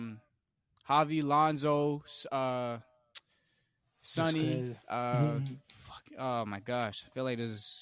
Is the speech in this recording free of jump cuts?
yes; 0 cuts

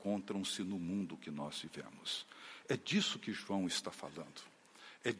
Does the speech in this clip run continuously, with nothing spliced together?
yes; 0 cuts

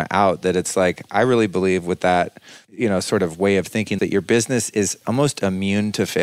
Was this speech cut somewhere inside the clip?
yes; 1 cut; at 4.0 s

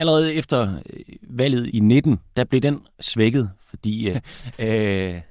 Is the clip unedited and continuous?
no; 2 cuts; at 1.7 s, 4.1 s

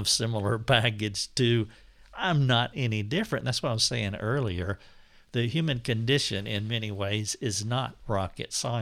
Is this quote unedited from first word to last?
yes; 0 cuts

